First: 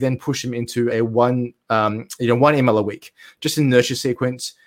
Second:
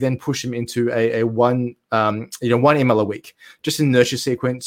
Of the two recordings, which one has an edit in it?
first; 1 cut; at 0.9 s

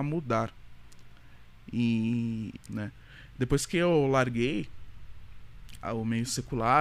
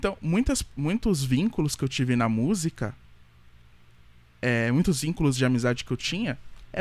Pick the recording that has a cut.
first; 2 cuts; at 2.6 s, 5.8 s

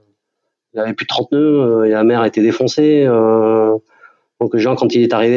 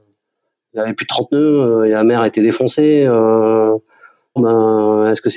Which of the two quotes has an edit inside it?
second; 1 cut; at 4.4 s

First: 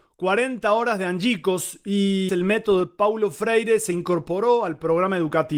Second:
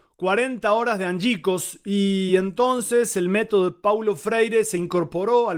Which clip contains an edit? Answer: first; 1 cut; at 2.3 s

